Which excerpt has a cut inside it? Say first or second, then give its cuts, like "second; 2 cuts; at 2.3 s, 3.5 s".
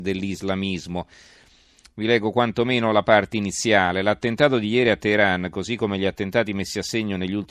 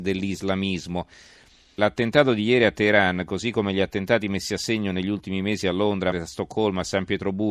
second; 2 cuts; at 1.8 s, 6.1 s